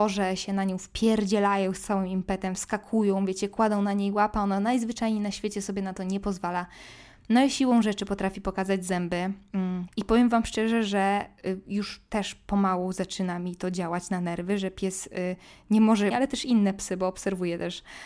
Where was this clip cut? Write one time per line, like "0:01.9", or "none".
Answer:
0:09.9
0:16.1